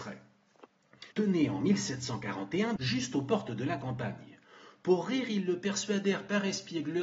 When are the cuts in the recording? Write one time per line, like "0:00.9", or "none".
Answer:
0:01.1
0:02.8